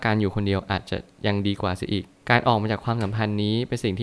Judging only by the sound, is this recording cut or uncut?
uncut